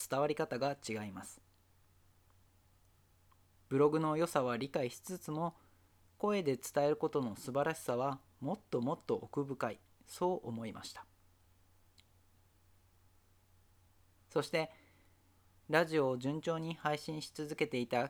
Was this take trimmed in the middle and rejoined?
no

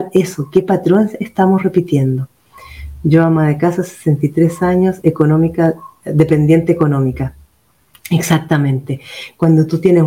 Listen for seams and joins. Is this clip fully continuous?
yes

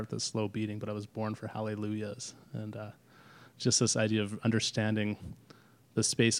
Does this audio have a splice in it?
no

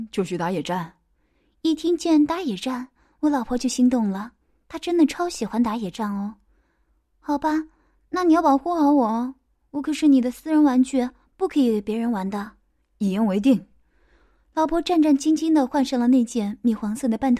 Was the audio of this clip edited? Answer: no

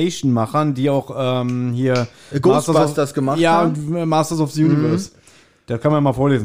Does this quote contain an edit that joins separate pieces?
no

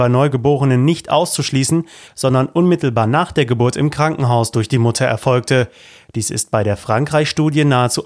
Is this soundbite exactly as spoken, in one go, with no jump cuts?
no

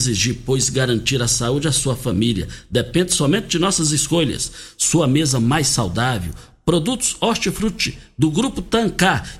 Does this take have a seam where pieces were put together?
no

